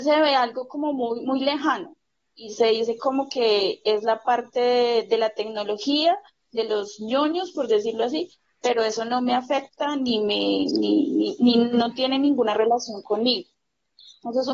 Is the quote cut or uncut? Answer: uncut